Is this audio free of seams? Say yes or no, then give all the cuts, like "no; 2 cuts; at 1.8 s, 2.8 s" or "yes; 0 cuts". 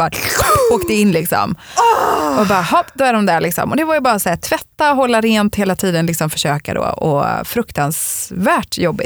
yes; 0 cuts